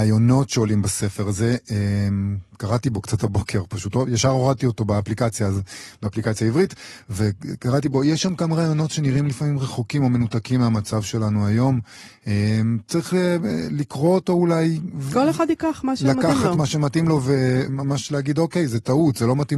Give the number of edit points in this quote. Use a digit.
1